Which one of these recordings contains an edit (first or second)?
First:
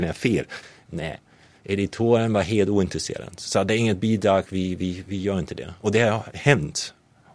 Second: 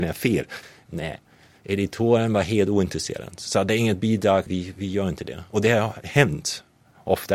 second